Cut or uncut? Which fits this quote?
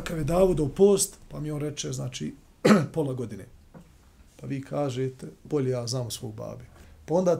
cut